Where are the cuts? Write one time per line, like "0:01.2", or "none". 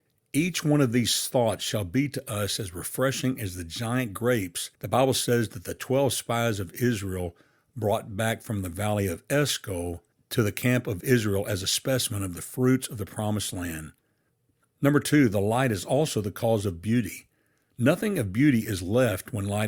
0:04.7